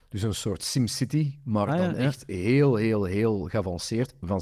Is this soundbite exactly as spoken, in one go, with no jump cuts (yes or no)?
yes